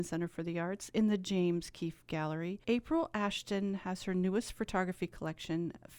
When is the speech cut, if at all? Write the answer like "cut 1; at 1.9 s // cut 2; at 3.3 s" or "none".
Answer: cut 1; at 2.6 s